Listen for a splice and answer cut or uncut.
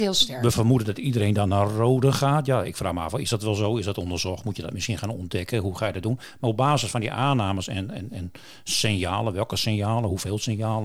uncut